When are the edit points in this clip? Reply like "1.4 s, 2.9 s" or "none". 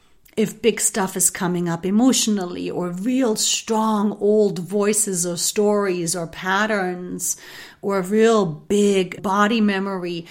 9.2 s